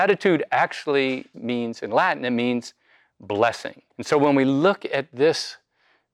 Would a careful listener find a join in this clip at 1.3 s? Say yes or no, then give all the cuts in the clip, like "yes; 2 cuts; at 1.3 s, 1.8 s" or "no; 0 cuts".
yes; 2 cuts; at 1.3 s, 3.9 s